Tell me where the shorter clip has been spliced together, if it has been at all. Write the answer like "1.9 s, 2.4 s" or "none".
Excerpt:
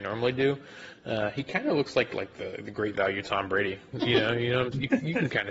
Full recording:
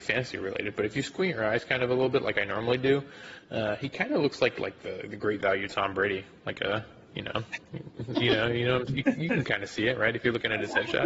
3.9 s